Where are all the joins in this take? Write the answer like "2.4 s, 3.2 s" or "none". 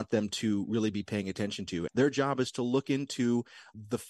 1.9 s